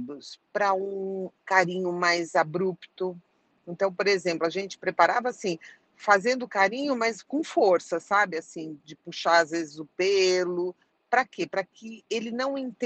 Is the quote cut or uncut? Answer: uncut